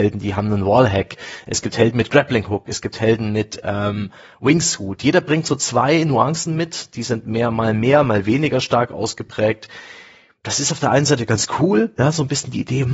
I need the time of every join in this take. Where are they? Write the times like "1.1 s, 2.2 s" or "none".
none

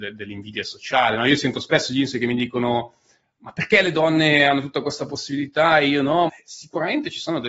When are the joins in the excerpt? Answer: 6.3 s

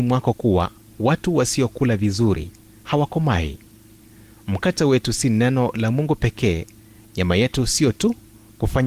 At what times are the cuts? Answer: none

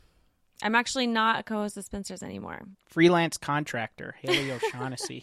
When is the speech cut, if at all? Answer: 2.7 s

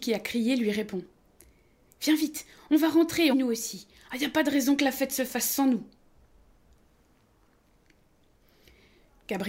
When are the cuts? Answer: 3.3 s

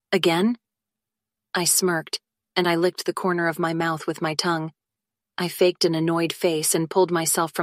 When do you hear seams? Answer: 5.2 s

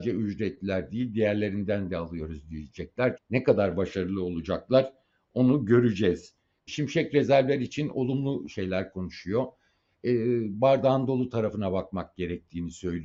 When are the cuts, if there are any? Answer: 3.2 s, 6.7 s

